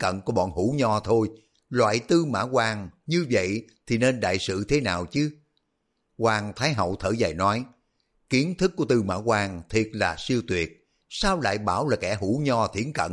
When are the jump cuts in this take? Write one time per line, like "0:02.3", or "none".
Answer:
none